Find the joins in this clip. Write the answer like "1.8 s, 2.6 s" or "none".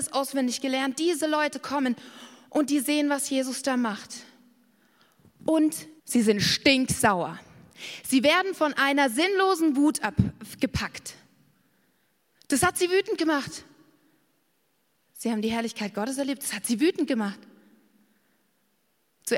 6.0 s